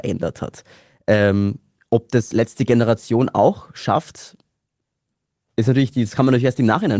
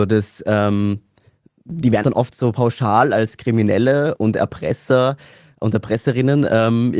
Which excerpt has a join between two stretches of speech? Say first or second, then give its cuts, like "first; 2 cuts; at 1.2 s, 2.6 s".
second; 2 cuts; at 2.0 s, 4.1 s